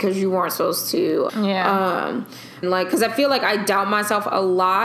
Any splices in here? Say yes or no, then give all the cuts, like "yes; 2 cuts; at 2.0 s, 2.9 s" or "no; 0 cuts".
yes; 2 cuts; at 1.3 s, 2.6 s